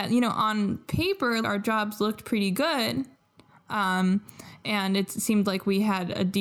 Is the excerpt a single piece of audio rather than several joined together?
no; 1 cut; at 1.4 s

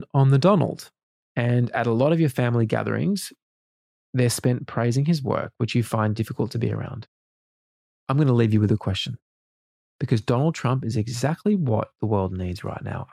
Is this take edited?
yes; 1 cut; at 1.2 s

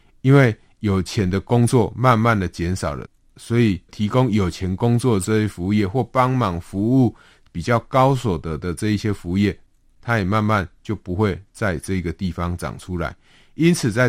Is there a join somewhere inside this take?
no; 0 cuts

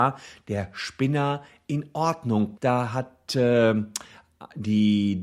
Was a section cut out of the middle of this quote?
yes; 1 cut; at 2.6 s

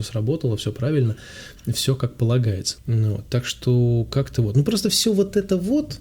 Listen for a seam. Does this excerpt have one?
yes; 1 cut; at 2.8 s

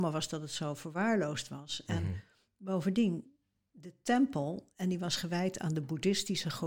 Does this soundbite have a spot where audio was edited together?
no; 0 cuts

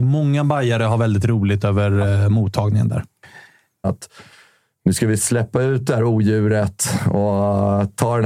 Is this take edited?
yes; 1 cut; at 3.8 s

